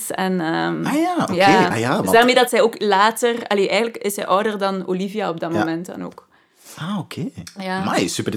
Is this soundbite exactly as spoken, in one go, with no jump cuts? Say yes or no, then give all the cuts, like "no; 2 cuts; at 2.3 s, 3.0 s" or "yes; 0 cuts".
yes; 0 cuts